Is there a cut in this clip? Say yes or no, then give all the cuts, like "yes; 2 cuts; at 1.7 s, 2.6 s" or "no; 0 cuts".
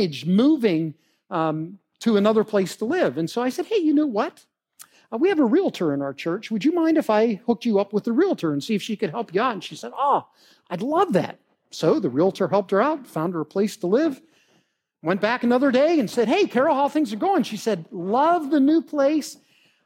no; 0 cuts